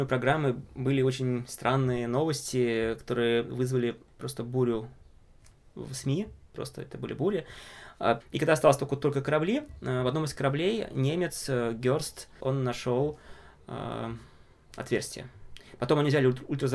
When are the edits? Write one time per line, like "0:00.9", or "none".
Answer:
0:08.2
0:12.4

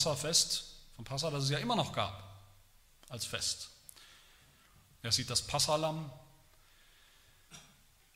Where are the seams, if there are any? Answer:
0:04.9

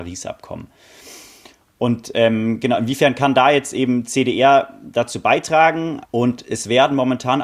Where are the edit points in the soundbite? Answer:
0:06.0

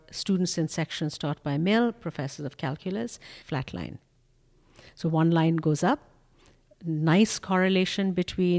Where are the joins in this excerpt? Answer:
0:03.4

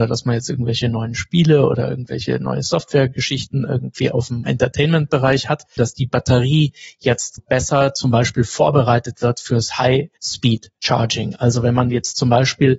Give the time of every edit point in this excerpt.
0:05.8
0:07.4

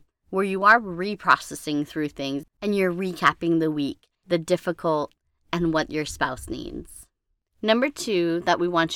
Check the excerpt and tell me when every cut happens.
0:04.1
0:07.4

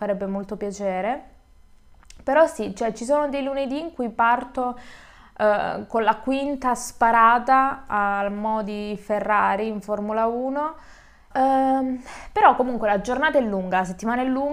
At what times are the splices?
0:11.3

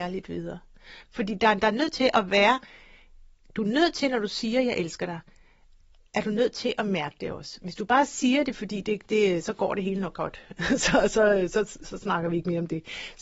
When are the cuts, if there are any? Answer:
0:01.1

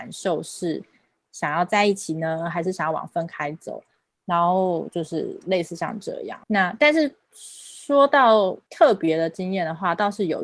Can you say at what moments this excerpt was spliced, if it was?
0:04.1
0:06.4

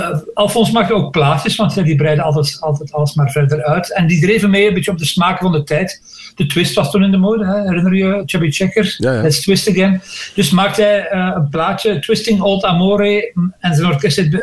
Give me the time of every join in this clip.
none

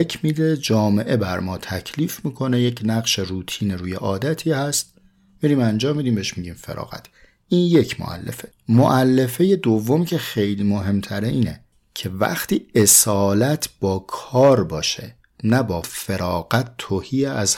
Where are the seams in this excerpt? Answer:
0:15.8

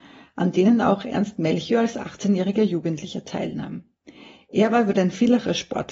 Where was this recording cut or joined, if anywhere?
none

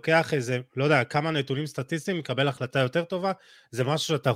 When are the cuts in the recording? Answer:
none

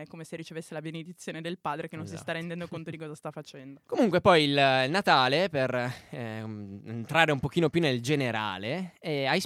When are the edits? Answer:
0:03.8

